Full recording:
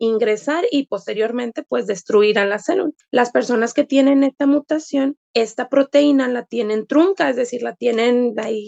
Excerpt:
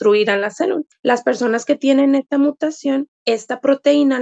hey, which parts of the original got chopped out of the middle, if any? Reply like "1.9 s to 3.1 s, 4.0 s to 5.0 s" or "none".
none